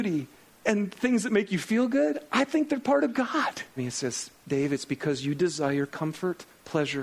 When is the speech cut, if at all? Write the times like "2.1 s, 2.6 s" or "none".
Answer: 3.8 s